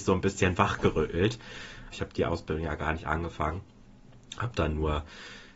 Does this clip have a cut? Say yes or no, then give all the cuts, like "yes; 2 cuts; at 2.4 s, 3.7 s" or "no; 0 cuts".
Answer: yes; 1 cut; at 1.9 s